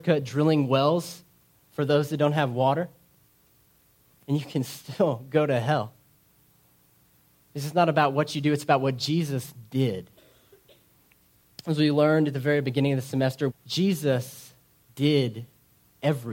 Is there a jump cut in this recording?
yes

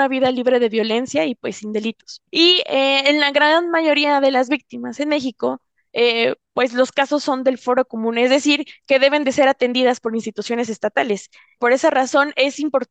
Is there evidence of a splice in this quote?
yes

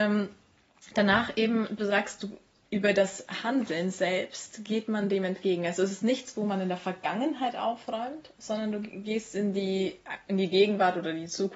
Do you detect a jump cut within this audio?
no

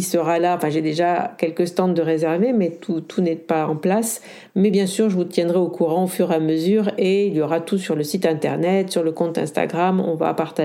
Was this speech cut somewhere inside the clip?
no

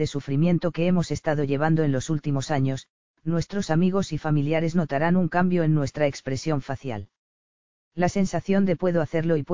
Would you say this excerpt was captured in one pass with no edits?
no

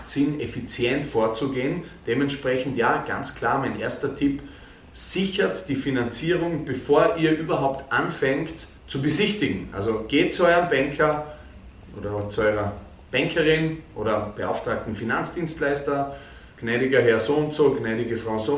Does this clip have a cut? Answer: yes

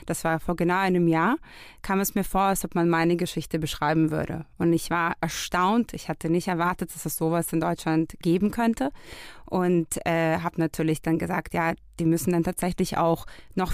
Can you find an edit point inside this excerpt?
no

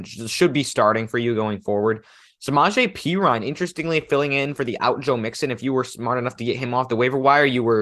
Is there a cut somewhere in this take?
no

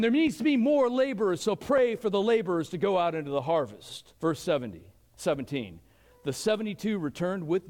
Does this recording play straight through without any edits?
no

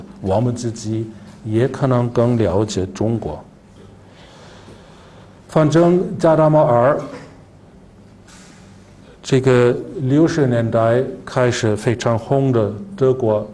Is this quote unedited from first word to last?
yes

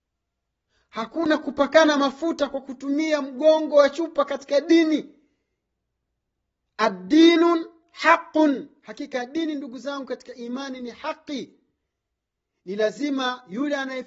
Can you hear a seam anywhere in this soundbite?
no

